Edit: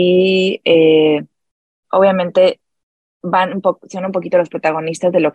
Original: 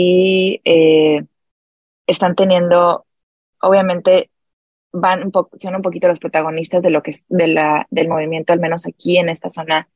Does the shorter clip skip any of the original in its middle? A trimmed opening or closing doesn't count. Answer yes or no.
yes